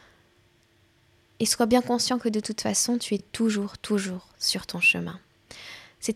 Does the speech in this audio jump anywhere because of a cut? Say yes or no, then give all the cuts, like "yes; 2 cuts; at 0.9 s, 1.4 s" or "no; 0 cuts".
no; 0 cuts